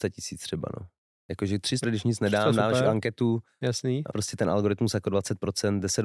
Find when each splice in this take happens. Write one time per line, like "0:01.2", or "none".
0:01.8
0:04.1